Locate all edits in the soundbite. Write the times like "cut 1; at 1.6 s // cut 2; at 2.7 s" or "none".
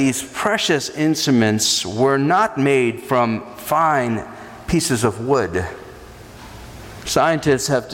cut 1; at 7.0 s